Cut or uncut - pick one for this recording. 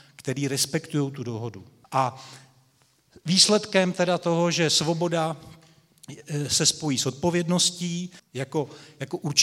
cut